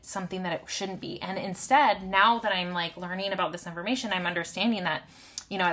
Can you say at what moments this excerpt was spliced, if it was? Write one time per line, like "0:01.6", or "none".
none